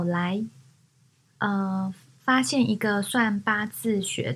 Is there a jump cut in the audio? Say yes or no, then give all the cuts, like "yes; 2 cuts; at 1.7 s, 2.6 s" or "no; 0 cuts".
yes; 1 cut; at 1.2 s